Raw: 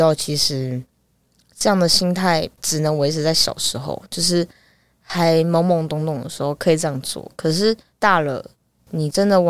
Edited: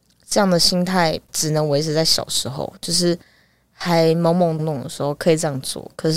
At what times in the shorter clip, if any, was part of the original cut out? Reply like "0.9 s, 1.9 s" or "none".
4.6 s